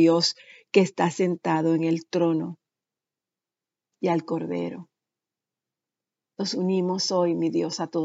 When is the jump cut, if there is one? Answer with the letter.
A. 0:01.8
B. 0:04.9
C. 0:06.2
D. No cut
D